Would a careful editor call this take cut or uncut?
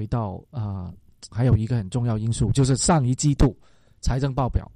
cut